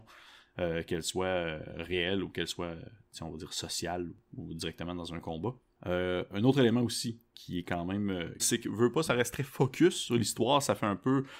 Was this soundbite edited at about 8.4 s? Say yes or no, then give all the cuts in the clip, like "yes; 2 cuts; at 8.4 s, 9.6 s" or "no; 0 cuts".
yes; 2 cuts; at 7.3 s, 8.4 s